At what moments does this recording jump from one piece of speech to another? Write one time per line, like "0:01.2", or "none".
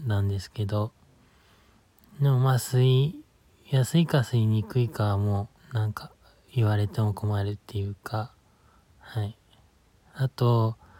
0:05.6